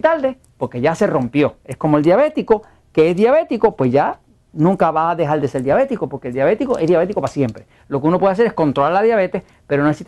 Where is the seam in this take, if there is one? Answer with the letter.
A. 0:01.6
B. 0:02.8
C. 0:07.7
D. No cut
D